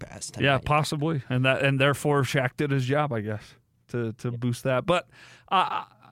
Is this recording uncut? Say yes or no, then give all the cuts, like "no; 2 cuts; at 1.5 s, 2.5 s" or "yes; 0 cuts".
yes; 0 cuts